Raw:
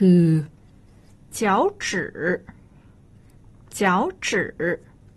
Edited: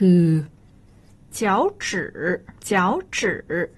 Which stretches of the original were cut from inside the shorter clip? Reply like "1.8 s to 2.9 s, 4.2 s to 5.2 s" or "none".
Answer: 2.6 s to 3.7 s